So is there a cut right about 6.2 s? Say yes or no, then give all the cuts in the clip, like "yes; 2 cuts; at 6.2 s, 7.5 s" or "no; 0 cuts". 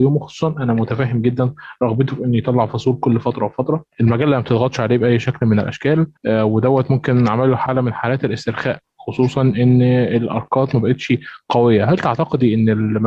yes; 1 cut; at 6.2 s